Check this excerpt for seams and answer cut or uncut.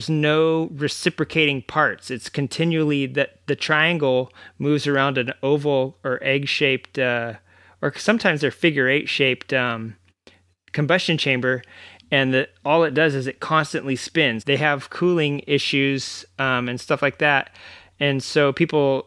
cut